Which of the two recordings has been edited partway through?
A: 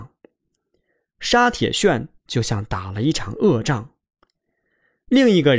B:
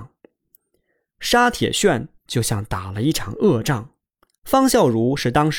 B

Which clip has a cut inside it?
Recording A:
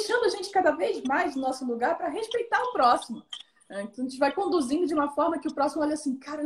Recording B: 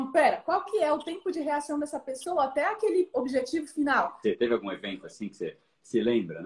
B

